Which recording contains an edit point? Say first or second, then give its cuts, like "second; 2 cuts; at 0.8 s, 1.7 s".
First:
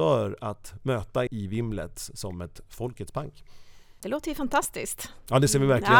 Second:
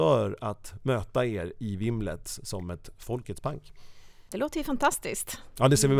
first; 1 cut; at 1.3 s